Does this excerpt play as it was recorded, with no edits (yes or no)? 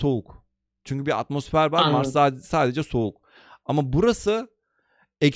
yes